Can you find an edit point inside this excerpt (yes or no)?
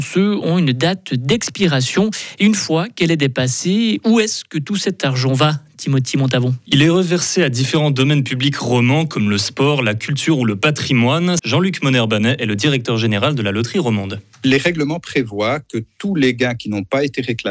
yes